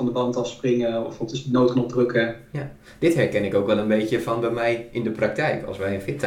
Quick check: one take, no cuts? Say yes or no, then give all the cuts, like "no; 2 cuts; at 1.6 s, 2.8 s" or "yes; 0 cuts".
yes; 0 cuts